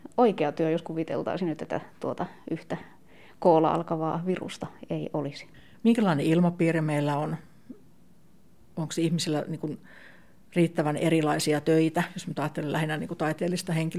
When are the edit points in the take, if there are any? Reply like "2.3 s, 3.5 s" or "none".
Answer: 5.7 s

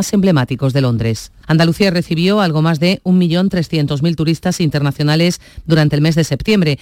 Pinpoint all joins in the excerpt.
1.4 s

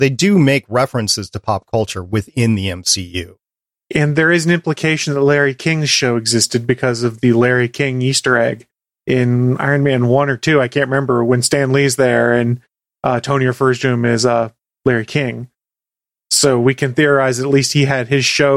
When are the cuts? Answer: none

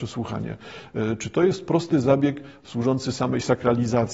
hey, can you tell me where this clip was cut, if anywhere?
none

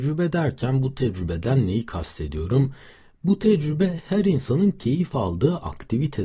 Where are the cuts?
none

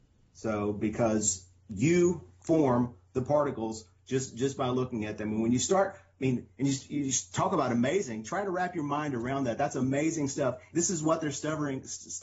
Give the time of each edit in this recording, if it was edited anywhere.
10.7 s

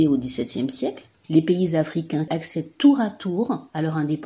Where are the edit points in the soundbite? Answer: 1.1 s, 2.3 s

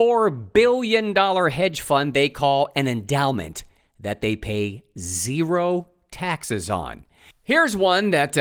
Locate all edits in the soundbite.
7.3 s

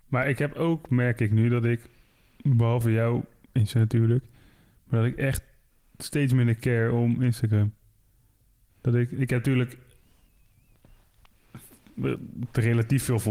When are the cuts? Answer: none

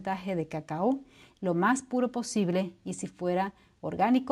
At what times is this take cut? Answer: none

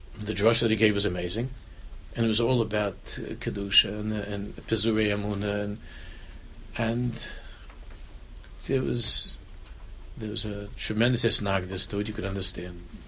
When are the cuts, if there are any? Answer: none

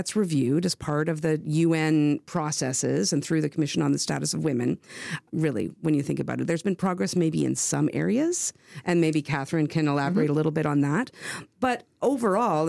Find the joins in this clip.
5.3 s

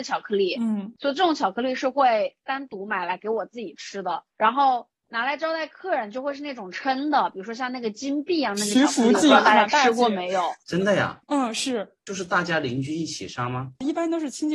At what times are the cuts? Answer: 4.3 s, 10.6 s

